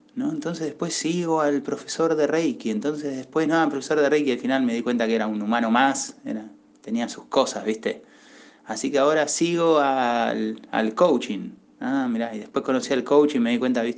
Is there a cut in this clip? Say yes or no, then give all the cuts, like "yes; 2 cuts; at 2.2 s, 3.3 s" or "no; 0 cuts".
no; 0 cuts